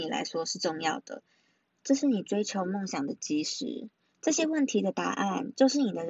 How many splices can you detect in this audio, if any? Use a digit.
1